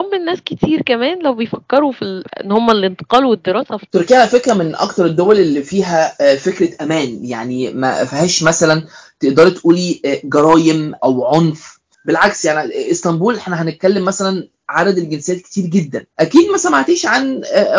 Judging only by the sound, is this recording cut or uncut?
cut